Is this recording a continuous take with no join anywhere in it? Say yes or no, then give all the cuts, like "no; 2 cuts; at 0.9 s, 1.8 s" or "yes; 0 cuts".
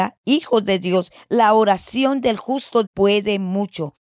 no; 2 cuts; at 1.2 s, 2.8 s